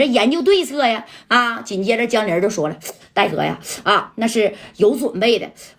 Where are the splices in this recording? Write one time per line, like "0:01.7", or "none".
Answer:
0:01.2
0:03.8